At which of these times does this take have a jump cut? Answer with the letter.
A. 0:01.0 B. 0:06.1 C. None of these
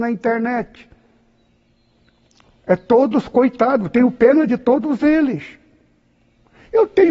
C